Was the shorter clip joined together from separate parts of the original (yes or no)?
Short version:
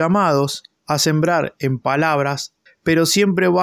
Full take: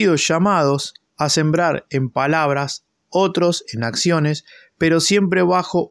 yes